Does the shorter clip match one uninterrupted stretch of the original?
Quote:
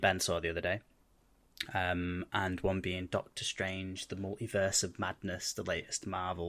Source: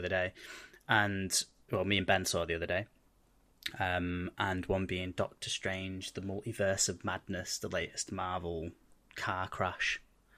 yes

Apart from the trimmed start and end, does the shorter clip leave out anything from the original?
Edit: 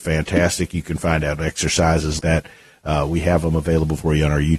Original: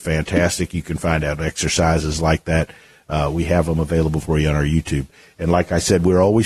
yes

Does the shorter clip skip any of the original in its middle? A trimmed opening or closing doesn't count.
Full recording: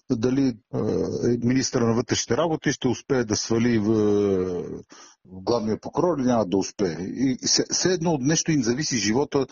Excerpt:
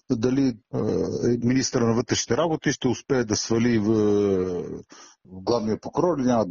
no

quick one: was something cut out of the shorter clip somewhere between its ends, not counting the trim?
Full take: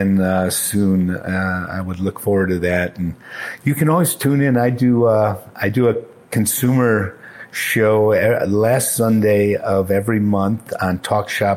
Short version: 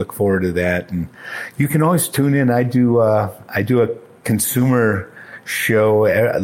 no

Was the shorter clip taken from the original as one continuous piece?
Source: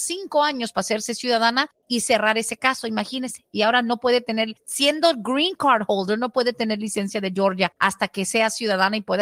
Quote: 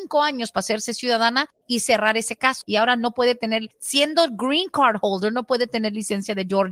no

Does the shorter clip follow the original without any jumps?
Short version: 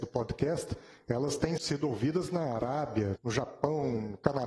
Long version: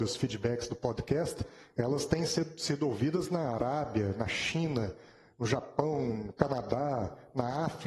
no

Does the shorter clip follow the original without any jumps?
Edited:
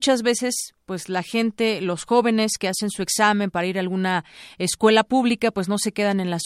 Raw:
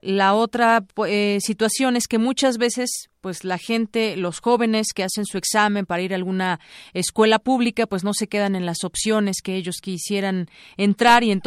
yes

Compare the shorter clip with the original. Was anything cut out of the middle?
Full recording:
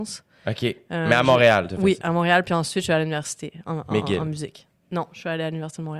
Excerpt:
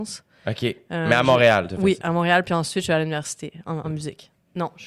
yes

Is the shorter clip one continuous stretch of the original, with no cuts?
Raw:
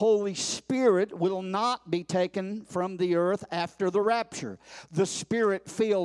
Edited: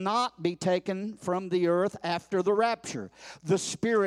yes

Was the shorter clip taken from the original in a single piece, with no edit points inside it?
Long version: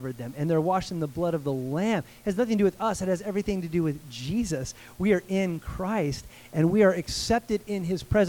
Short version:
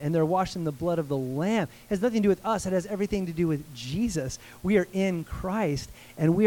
yes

